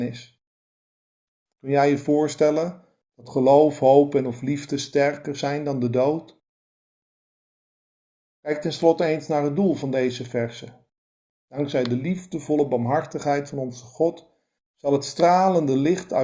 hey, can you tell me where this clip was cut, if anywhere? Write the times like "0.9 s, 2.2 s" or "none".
none